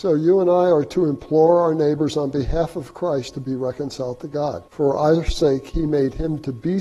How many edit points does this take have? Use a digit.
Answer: 1